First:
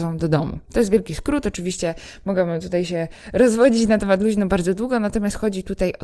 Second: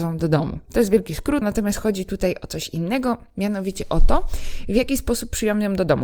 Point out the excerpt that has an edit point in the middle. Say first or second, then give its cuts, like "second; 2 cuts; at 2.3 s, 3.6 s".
second; 1 cut; at 1.4 s